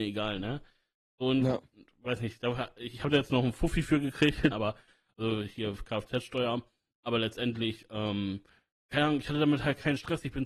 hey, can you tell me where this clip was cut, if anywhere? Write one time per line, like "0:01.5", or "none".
0:04.5